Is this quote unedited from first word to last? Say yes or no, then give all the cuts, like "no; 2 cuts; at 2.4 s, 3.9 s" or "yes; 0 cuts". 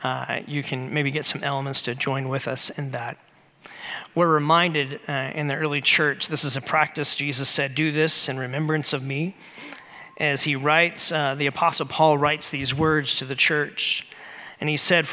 yes; 0 cuts